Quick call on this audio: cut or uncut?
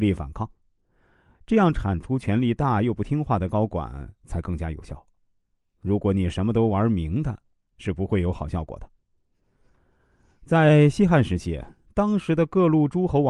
cut